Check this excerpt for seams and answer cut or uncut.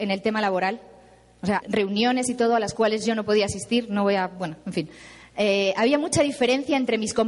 cut